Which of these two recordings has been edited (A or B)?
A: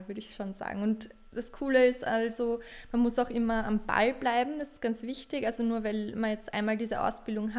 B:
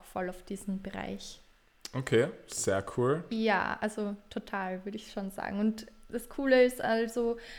B